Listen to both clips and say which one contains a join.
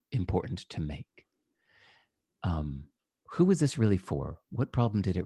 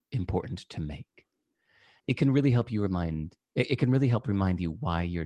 second; 1 cut; at 2.0 s

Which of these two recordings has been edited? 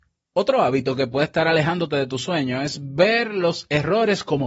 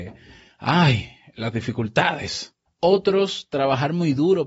second; 1 cut; at 2.7 s

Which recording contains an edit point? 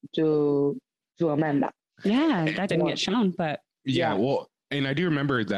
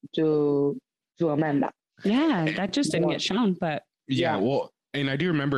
first; 1 cut; at 2.7 s

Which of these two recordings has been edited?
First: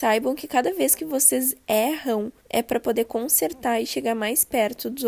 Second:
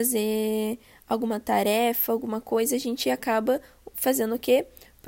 first; 1 cut; at 2.4 s

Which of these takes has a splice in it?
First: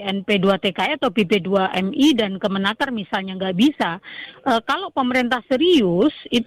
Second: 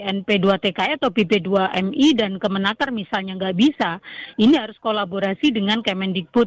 first; 1 cut; at 4.3 s

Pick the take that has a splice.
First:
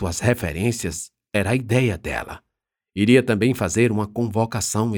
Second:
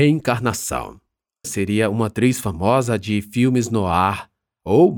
second; 1 cut; at 1.4 s

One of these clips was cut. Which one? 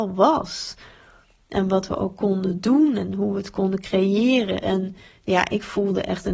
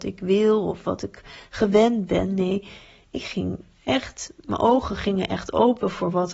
first; 1 cut; at 4.6 s

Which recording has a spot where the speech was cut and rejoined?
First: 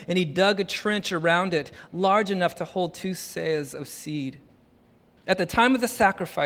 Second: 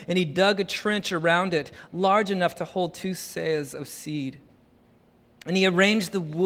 first; 1 cut; at 5.2 s

